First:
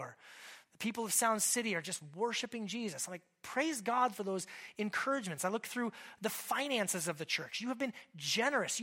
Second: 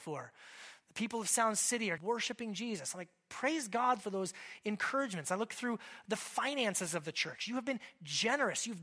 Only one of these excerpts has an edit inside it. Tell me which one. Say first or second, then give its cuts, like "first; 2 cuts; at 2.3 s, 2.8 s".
second; 1 cut; at 2.0 s